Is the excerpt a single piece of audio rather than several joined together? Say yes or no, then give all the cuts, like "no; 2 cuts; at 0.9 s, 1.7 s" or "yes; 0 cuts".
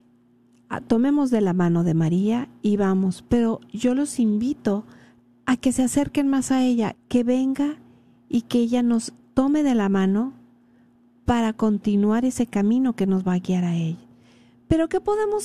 no; 1 cut; at 6.9 s